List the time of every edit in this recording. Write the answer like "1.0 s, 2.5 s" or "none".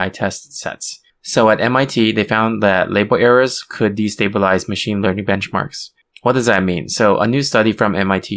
none